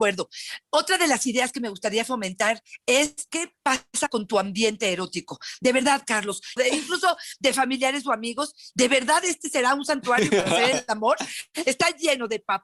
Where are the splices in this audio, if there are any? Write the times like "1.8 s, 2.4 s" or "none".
6.6 s, 8.7 s